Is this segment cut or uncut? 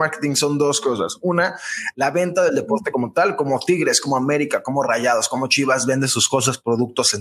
uncut